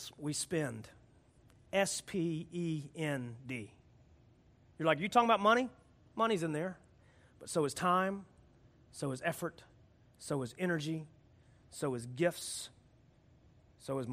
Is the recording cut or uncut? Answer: uncut